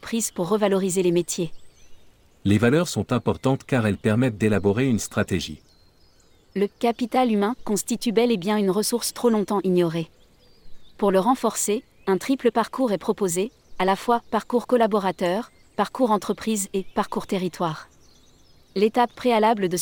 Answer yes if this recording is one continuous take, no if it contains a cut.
yes